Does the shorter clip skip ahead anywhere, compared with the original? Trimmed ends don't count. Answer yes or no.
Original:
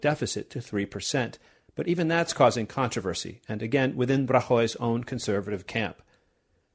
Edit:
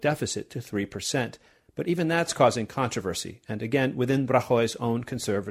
no